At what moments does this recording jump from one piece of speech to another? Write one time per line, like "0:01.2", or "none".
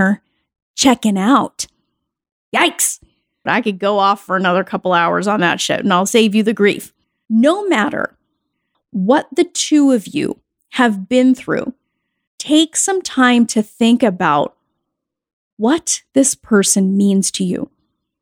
0:03.5